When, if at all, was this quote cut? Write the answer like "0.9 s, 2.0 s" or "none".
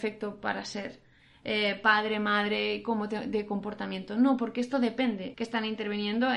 5.3 s